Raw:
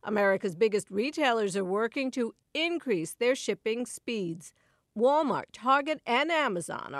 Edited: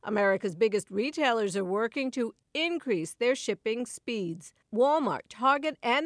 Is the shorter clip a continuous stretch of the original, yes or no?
no